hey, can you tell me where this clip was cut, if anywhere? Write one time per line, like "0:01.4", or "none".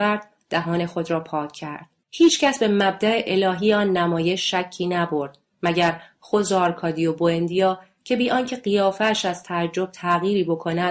0:02.0